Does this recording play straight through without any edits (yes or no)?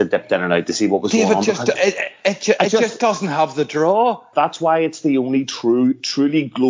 no